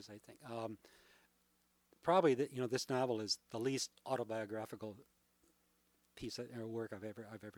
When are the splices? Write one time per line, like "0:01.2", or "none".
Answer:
none